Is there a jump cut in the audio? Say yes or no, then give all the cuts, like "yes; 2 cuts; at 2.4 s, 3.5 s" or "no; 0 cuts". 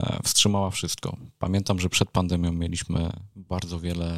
no; 0 cuts